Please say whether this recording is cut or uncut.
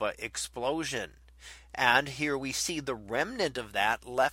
uncut